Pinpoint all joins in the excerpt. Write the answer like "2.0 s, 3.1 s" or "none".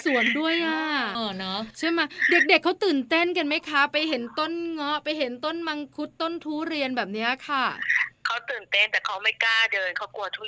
1.1 s